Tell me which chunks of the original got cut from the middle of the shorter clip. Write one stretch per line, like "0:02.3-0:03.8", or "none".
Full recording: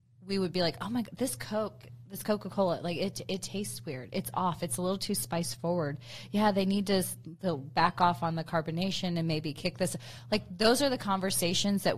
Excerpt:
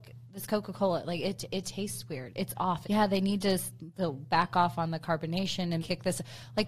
0:04.6-0:06.3
0:09.2-0:09.5